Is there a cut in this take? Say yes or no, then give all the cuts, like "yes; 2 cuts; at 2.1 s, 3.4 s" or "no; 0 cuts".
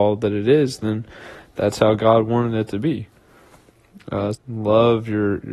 yes; 1 cut; at 4.3 s